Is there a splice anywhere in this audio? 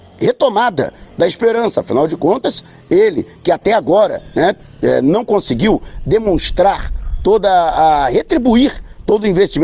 no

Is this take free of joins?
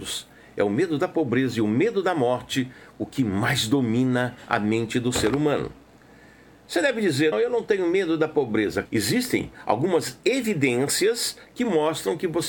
no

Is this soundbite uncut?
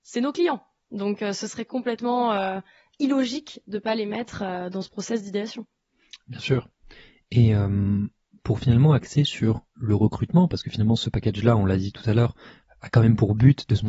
yes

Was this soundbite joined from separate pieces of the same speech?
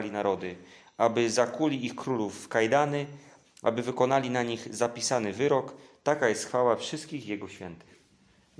yes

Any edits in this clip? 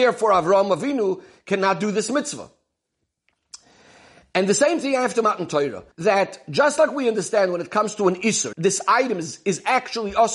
yes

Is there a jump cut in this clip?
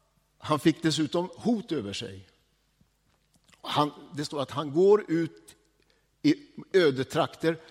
no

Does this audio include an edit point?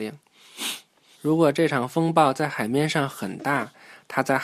yes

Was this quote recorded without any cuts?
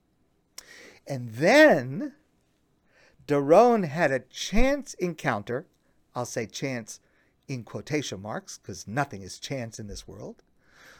yes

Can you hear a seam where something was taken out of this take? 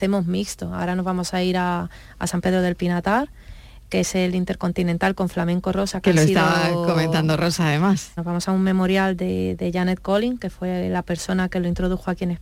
yes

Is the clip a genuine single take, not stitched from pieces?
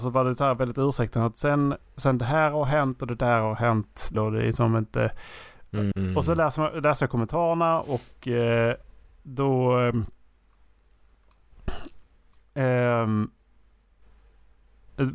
no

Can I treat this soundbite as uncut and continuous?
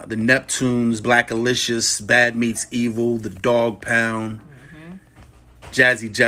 yes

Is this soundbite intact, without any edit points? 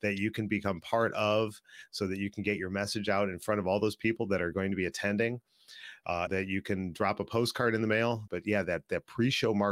no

